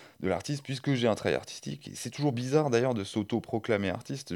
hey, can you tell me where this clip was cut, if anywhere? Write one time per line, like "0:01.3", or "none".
none